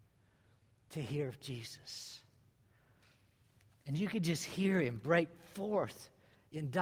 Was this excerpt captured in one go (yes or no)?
yes